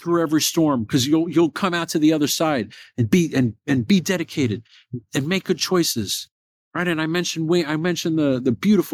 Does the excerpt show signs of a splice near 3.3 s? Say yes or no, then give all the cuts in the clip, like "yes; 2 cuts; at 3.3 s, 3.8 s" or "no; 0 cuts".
no; 0 cuts